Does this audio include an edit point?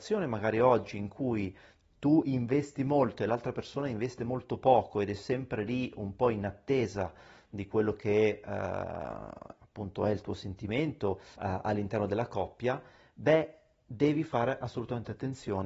yes; 1 cut; at 11.3 s

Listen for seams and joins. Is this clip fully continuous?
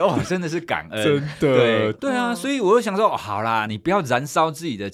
no; 2 cuts; at 2.0 s, 3.7 s

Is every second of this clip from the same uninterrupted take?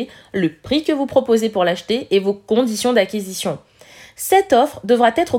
yes; 0 cuts

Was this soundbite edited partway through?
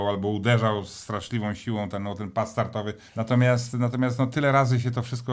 yes; 1 cut; at 3.1 s

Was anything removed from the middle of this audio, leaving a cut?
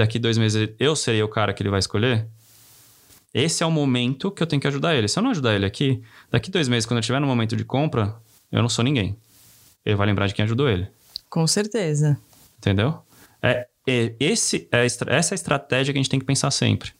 no; 0 cuts

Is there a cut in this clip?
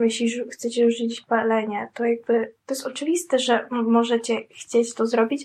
yes; 1 cut; at 2.6 s

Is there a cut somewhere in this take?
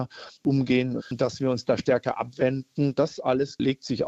yes; 1 cut; at 1.0 s

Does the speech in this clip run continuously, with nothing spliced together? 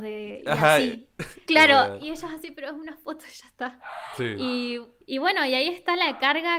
no; 1 cut; at 1.4 s

